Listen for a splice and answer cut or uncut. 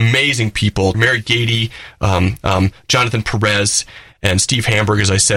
cut